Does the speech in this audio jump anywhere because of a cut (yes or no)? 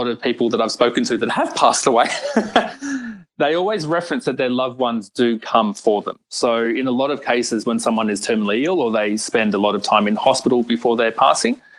no